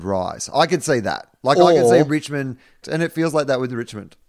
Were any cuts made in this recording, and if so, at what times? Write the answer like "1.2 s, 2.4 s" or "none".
2.8 s